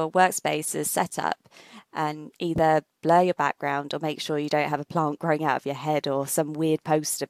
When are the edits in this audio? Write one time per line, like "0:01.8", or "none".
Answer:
none